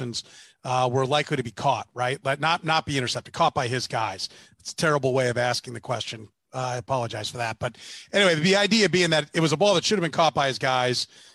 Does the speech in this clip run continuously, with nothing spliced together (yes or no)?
yes